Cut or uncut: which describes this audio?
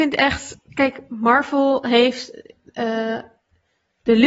uncut